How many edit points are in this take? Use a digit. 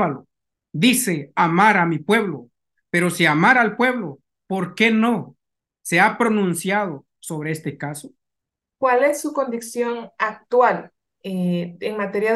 1